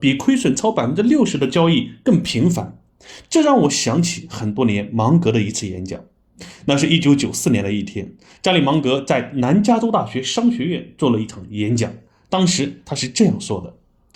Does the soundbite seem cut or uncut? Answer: uncut